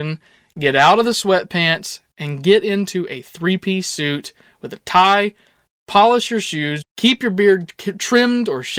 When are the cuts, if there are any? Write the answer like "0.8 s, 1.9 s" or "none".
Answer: 6.8 s